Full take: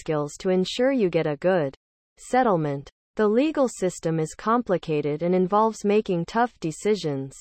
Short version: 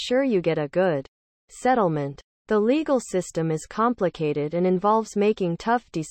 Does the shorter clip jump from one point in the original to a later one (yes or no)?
no